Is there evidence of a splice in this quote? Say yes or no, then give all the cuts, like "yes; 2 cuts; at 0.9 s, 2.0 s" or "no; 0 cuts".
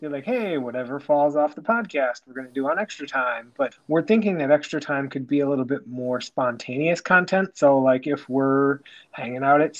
yes; 1 cut; at 3.7 s